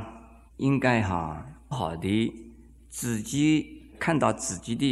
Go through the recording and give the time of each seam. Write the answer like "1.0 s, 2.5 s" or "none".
1.7 s